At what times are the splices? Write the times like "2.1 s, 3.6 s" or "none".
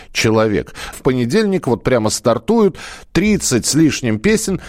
0.9 s